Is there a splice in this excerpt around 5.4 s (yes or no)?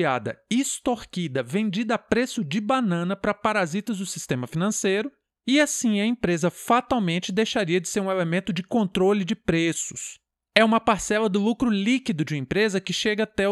no